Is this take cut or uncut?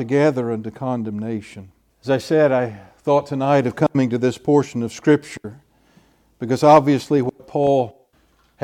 cut